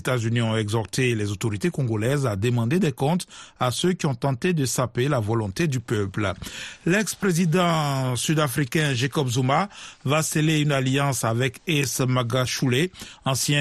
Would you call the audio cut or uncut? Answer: uncut